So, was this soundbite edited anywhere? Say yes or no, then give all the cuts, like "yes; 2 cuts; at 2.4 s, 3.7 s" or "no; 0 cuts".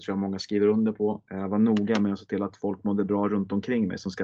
no; 0 cuts